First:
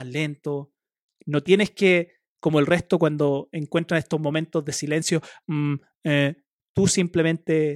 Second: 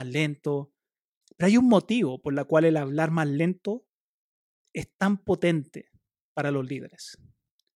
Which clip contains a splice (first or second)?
first